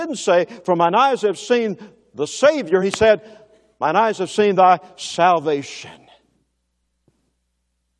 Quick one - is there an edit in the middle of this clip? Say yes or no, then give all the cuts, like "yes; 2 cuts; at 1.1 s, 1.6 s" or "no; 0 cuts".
no; 0 cuts